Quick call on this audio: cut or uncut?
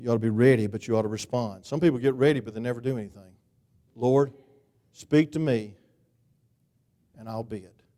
cut